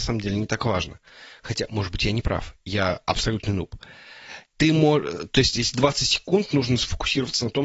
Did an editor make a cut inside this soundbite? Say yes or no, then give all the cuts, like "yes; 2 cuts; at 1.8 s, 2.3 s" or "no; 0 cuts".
no; 0 cuts